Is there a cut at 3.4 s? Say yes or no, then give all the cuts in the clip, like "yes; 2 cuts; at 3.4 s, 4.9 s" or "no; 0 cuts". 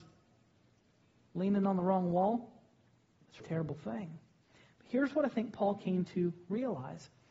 yes; 1 cut; at 3.4 s